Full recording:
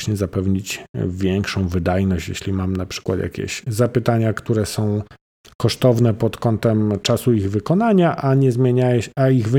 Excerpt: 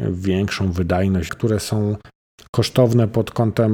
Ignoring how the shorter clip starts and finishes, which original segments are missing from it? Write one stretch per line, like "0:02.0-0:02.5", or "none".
0:02.2-0:04.3